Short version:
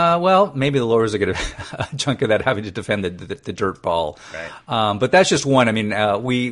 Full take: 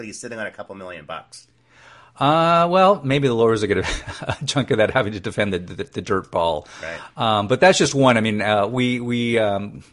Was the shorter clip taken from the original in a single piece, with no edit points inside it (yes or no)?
yes